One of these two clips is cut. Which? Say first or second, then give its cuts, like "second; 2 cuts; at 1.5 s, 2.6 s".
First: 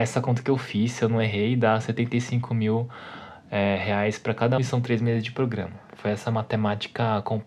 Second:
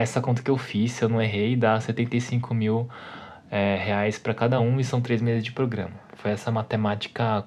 first; 1 cut; at 4.6 s